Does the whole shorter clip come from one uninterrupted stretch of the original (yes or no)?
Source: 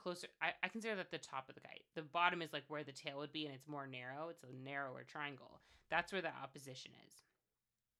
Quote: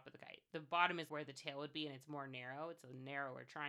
no